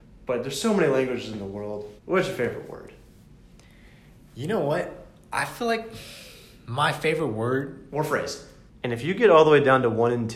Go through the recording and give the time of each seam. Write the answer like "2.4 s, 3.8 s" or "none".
2.0 s, 8.7 s

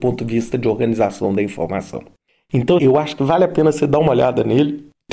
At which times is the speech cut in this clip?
2.8 s

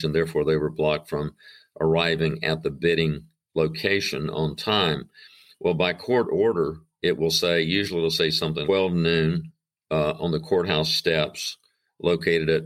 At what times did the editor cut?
8.7 s

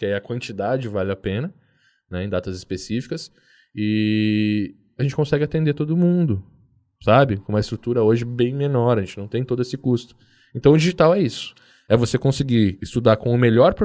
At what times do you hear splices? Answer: none

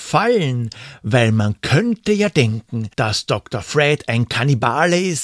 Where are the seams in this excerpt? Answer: 2.9 s

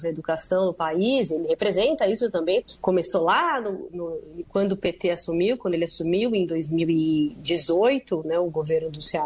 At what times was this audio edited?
2.6 s, 4.4 s

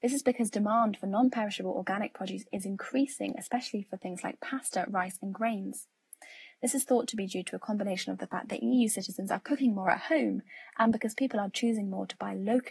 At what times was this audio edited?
none

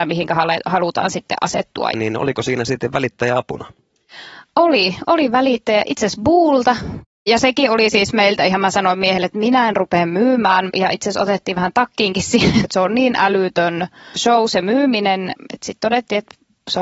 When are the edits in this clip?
1.9 s, 10.7 s, 12.6 s

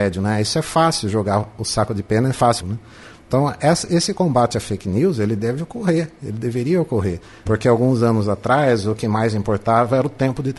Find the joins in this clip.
2.6 s, 7.5 s

